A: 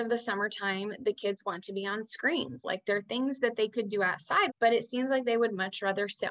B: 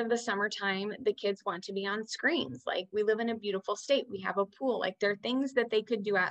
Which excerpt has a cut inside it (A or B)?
A